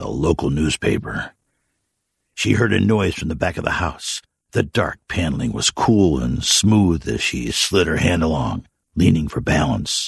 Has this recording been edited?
yes; 1 cut; at 4.4 s

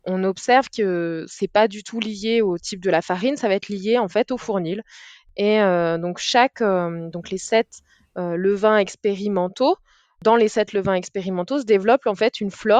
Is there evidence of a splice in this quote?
no; 0 cuts

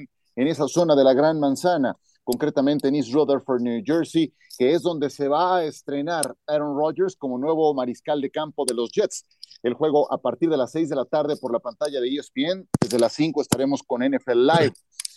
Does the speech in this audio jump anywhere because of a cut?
no; 0 cuts

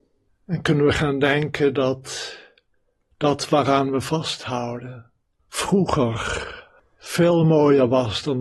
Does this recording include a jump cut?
no; 0 cuts

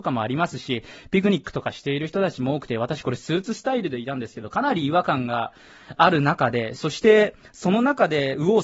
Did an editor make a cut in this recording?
no; 0 cuts

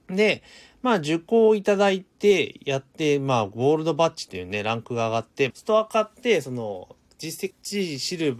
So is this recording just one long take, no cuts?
no; 2 cuts; at 5.5 s, 7.5 s

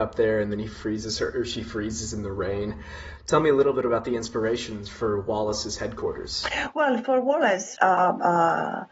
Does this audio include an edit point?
yes; 2 cuts; at 3.2 s, 7.8 s

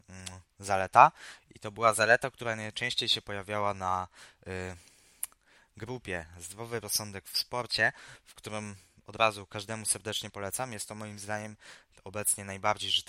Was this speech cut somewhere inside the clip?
yes; 1 cut; at 8.3 s

